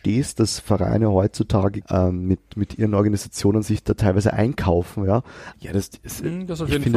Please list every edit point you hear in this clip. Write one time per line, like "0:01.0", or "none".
0:01.8
0:05.5